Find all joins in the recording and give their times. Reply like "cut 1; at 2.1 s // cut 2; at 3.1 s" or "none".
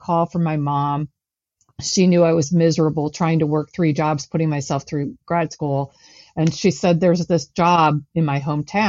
none